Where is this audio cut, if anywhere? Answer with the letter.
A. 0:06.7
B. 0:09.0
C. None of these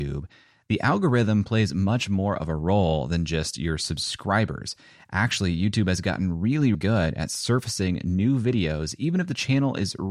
A